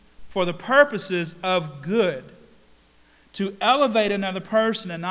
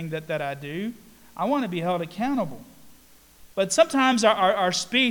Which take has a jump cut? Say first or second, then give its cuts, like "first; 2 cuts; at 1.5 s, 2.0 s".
second; 1 cut; at 3.5 s